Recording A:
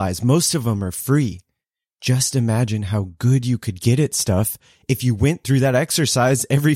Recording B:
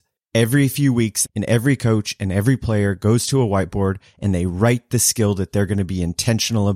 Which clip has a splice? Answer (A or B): B